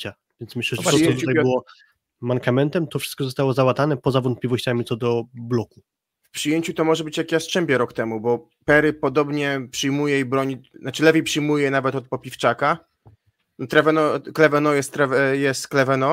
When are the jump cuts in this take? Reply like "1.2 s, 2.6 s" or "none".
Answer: none